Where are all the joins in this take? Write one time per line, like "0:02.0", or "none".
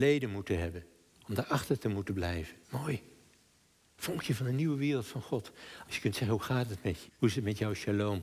0:02.6
0:05.8
0:07.1